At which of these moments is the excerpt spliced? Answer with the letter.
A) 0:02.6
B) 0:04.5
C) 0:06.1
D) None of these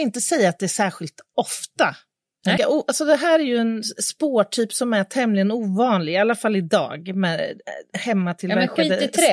A